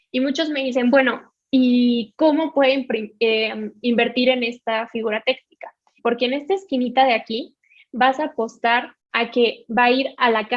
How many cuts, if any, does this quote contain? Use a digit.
2